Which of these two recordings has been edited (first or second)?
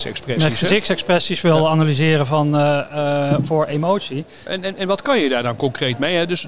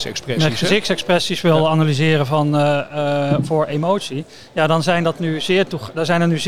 first